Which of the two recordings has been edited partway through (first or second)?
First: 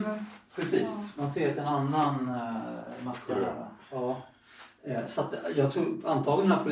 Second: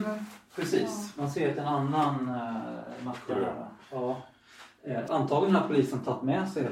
second